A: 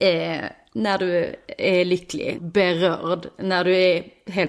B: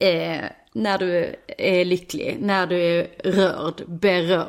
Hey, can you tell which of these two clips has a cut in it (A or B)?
A